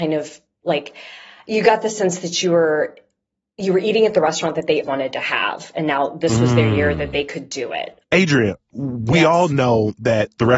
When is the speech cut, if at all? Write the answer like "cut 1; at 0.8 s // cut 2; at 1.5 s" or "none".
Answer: cut 1; at 4.8 s